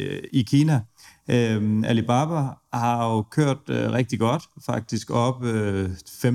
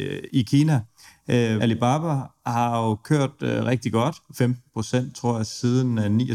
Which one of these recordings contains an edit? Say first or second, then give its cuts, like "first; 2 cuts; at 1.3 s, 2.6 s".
second; 2 cuts; at 1.6 s, 4.3 s